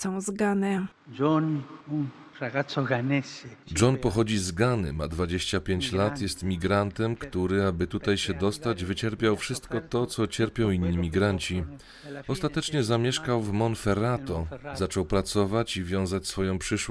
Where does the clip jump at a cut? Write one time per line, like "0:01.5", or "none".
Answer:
none